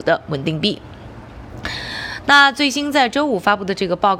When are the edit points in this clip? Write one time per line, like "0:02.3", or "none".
none